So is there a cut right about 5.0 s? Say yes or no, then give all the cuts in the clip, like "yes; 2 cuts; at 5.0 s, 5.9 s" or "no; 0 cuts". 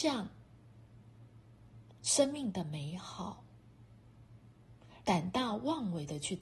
yes; 1 cut; at 5.0 s